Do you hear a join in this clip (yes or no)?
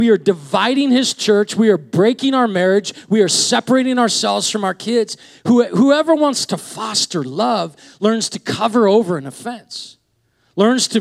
no